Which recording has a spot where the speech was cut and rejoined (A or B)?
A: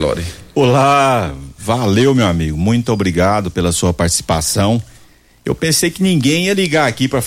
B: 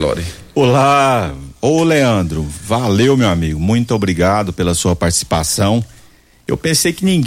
A